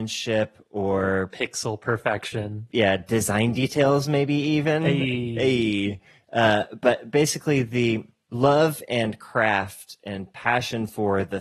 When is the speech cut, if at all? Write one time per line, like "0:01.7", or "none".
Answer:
none